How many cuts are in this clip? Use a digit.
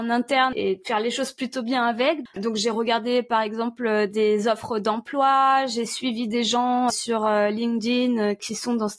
2